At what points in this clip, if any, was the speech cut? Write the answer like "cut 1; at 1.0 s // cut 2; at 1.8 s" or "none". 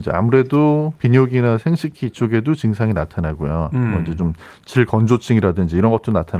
none